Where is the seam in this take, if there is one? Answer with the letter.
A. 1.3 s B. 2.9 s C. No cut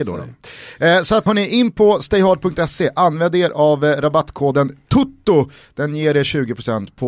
A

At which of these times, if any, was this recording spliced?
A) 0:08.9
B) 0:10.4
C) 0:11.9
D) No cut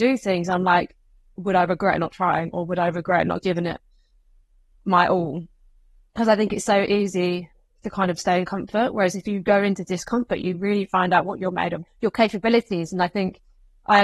C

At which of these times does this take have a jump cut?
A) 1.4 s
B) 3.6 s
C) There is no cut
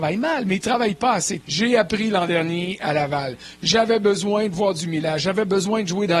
A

